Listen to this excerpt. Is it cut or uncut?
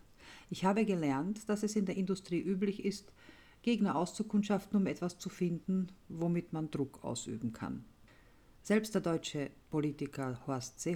uncut